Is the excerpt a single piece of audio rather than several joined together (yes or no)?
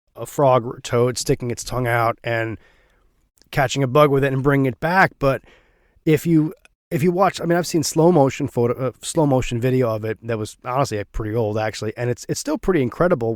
yes